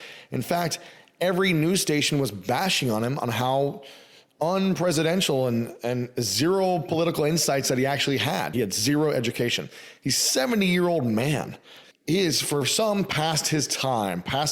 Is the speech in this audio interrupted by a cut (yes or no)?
yes